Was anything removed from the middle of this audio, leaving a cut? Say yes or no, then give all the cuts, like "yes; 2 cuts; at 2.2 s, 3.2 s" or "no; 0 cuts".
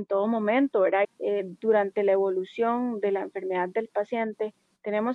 yes; 1 cut; at 1.0 s